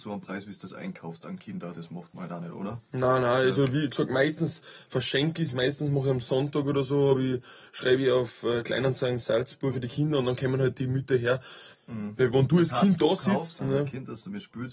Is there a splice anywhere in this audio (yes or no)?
yes